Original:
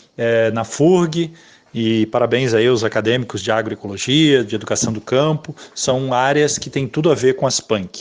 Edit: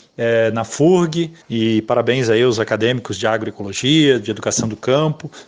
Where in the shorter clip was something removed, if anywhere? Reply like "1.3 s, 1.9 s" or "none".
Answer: 1.4 s